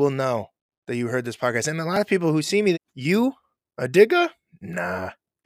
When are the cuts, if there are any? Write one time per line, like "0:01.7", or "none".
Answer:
0:02.7